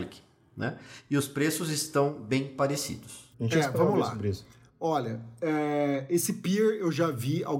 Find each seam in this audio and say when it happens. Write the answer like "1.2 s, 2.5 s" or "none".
3.3 s